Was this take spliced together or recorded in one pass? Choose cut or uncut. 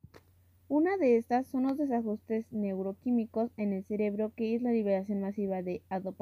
uncut